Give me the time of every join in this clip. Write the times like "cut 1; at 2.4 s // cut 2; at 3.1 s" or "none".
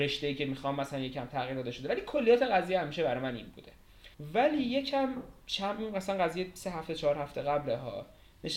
cut 1; at 4.1 s